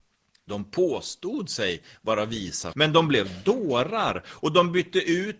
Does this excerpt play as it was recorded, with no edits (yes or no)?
no